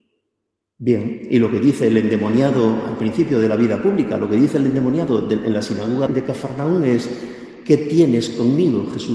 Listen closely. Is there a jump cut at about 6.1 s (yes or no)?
yes